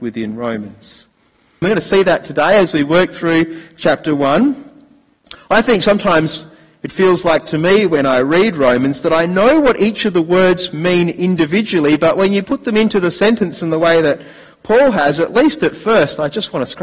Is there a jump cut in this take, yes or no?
yes